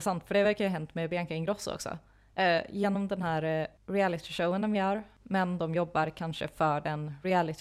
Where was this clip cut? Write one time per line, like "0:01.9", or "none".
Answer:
0:05.2